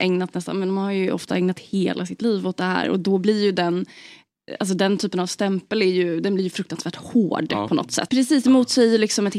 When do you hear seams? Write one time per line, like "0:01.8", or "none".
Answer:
0:08.1